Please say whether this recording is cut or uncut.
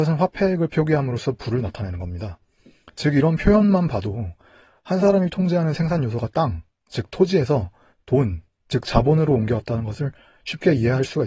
uncut